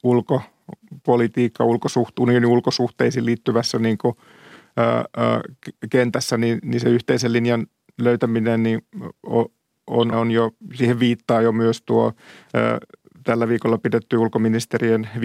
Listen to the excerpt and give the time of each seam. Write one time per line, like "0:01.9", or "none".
0:10.1

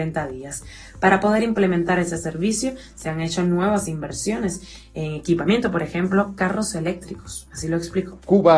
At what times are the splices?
none

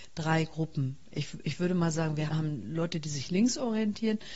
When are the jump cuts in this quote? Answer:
0:02.3

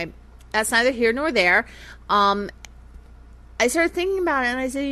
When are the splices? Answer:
none

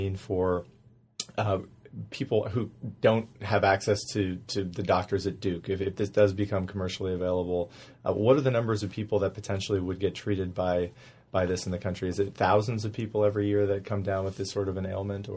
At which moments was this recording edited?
none

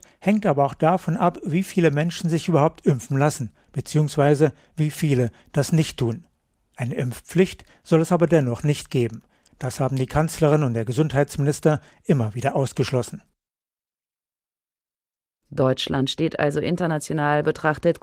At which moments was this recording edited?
none

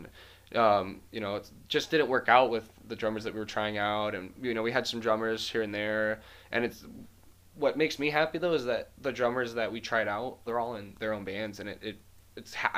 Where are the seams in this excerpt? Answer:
0:10.5

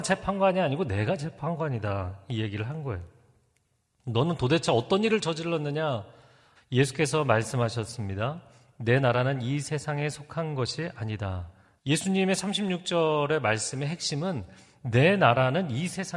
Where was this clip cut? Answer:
0:06.6
0:11.8

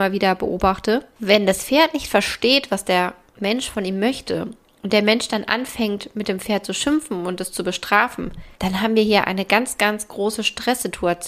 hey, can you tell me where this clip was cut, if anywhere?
0:08.5

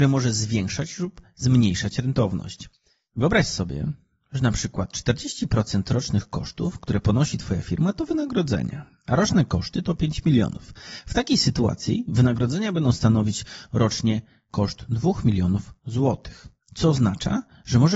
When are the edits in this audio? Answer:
none

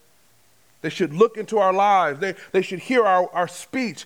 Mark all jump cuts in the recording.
none

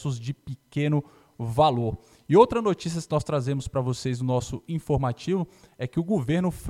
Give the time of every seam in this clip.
none

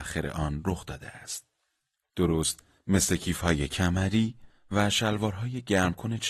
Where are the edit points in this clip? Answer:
0:02.0

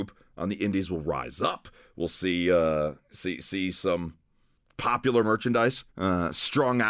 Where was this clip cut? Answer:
0:05.9

